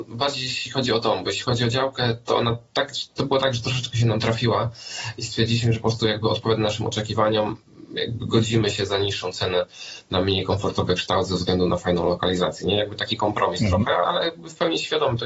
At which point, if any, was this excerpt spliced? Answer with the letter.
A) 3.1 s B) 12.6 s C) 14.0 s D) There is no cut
C